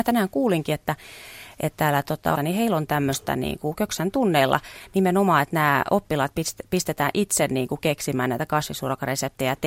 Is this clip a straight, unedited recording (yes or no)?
no